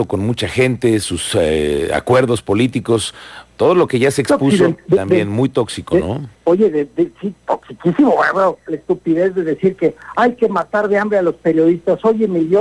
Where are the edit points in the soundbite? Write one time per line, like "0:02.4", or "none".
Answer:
0:06.4
0:08.7